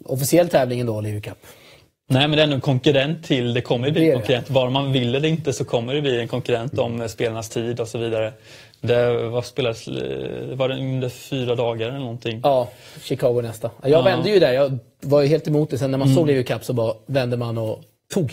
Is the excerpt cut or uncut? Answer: uncut